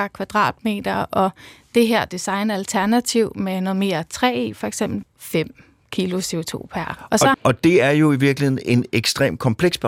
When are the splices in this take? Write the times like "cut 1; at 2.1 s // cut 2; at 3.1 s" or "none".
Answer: cut 1; at 5.0 s // cut 2; at 7.3 s